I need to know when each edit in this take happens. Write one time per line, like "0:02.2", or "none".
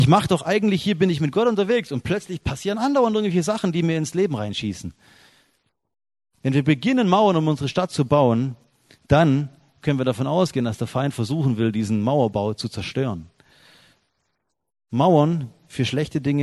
none